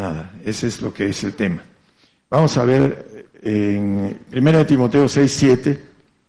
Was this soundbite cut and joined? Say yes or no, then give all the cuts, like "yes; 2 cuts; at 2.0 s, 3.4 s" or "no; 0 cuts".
no; 0 cuts